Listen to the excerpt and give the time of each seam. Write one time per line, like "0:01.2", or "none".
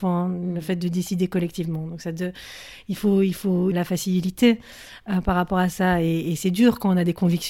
0:03.7